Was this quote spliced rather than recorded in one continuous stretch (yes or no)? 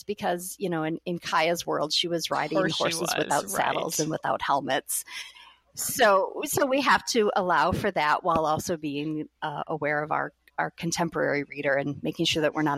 no